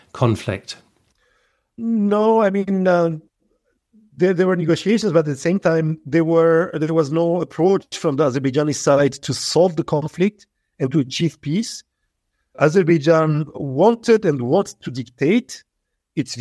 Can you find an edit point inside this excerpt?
no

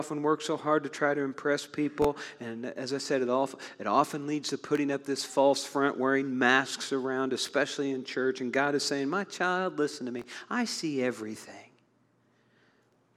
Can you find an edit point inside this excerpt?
no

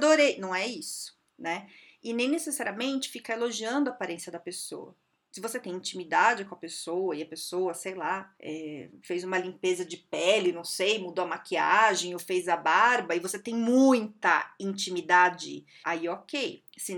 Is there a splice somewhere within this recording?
yes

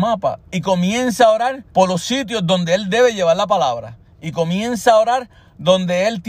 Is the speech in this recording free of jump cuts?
no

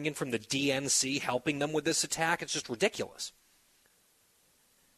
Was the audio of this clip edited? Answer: no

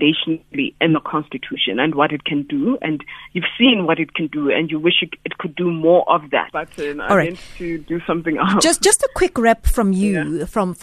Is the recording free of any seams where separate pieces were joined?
no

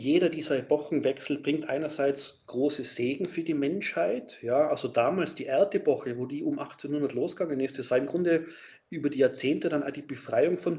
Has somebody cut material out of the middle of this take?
no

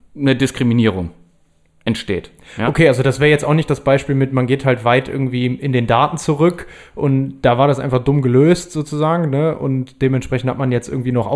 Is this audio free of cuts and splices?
yes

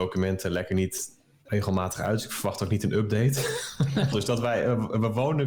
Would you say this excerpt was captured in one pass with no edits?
no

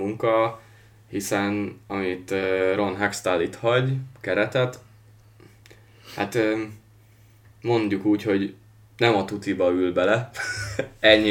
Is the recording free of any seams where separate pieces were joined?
no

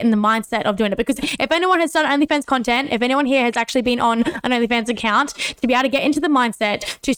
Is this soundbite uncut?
yes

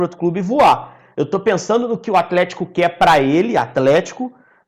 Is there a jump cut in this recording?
no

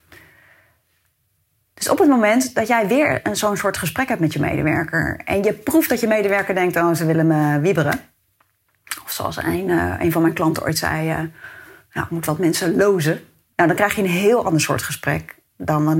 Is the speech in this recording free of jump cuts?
no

